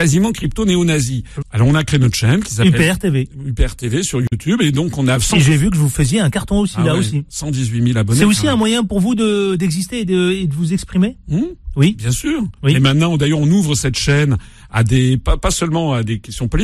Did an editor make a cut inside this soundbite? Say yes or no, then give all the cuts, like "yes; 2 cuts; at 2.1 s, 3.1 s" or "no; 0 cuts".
yes; 1 cut; at 1.4 s